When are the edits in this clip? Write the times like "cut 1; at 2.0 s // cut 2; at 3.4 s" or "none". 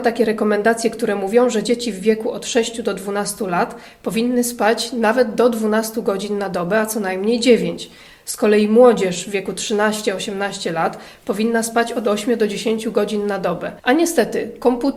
cut 1; at 13.8 s